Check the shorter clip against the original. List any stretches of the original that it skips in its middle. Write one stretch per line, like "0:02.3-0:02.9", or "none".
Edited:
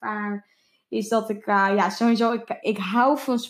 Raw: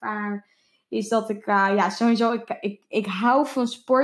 0:02.6-0:02.9